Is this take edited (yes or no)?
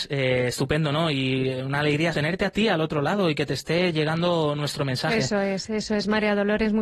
yes